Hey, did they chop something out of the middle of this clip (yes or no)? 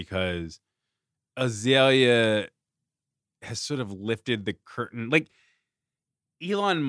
no